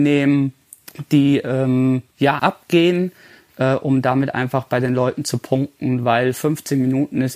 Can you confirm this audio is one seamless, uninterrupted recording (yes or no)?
no